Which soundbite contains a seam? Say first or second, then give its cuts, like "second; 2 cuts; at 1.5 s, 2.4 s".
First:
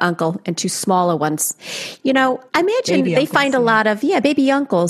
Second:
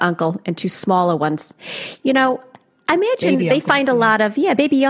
first; 1 cut; at 2.5 s